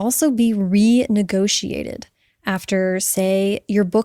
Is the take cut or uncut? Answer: uncut